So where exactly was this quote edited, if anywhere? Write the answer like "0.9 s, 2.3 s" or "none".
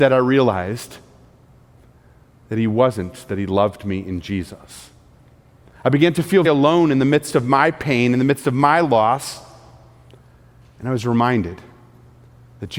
6.4 s